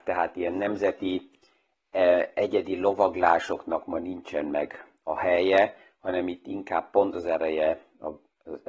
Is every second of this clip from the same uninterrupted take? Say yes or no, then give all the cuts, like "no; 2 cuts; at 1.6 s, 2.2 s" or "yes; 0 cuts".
no; 1 cut; at 7.1 s